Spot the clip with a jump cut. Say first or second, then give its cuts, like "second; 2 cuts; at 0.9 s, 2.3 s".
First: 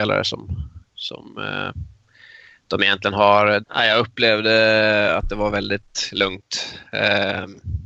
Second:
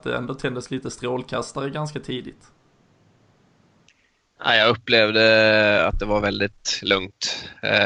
first; 1 cut; at 3.6 s